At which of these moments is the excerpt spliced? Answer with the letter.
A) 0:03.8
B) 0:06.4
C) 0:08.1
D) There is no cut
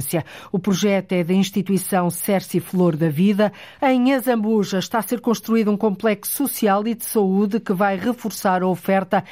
A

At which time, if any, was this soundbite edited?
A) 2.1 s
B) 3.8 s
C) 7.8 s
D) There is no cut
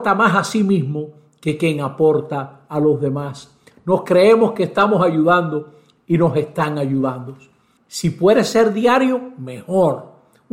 C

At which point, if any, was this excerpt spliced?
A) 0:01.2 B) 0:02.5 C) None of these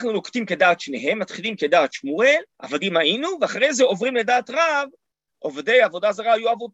B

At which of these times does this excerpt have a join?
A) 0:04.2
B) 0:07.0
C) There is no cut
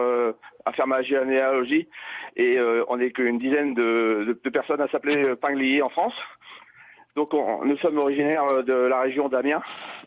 C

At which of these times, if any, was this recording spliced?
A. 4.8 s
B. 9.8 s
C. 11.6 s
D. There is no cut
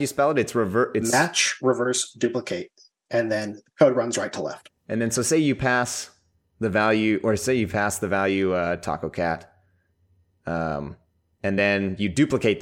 D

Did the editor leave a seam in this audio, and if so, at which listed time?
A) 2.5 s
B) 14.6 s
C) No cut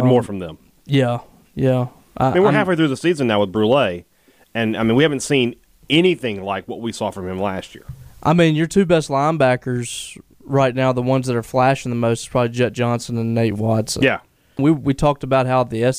B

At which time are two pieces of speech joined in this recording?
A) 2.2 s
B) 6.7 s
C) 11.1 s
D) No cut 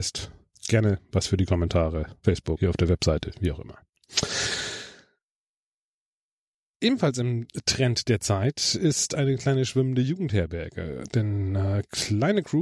D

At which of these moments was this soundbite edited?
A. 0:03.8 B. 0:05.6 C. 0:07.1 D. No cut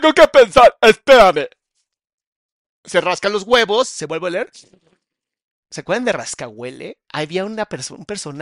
C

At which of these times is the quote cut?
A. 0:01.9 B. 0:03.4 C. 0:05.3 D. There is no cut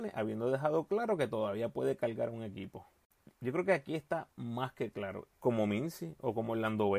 C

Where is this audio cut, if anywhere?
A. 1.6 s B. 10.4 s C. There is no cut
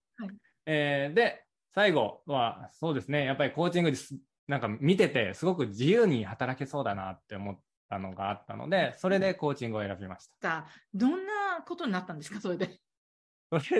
B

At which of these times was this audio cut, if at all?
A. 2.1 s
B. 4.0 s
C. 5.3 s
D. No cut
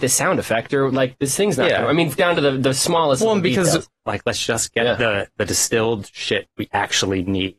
B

